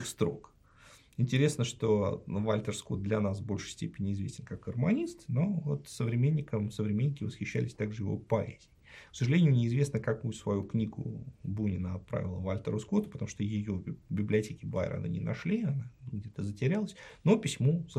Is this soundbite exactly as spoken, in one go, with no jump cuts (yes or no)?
yes